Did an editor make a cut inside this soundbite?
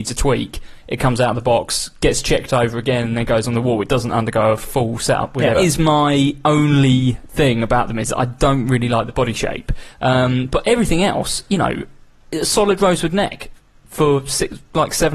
yes; 1 cut; at 5.5 s

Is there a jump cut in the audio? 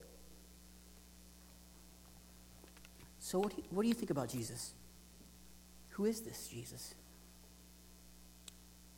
no; 0 cuts

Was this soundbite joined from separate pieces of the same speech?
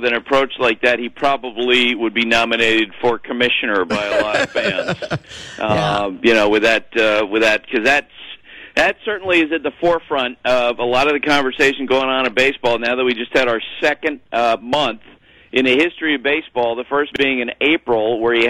no; 0 cuts

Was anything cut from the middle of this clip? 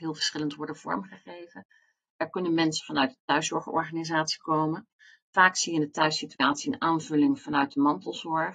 no; 0 cuts

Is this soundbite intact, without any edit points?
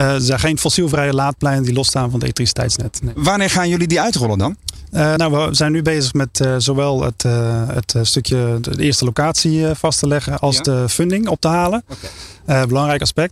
yes; 0 cuts

